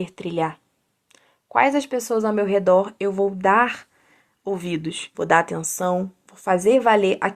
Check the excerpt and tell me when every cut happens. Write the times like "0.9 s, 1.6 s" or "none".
5.1 s